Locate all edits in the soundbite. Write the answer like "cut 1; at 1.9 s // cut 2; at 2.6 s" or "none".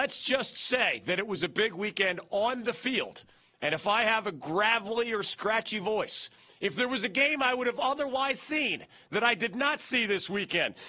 none